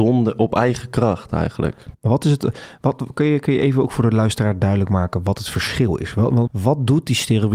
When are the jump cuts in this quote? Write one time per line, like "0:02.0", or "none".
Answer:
0:06.5